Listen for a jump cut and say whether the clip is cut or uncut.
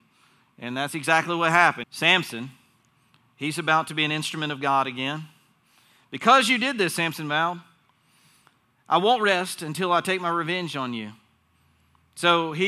cut